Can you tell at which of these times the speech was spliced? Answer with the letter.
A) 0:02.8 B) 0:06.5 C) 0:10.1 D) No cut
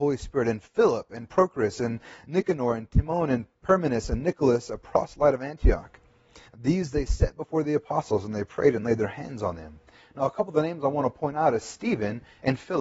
B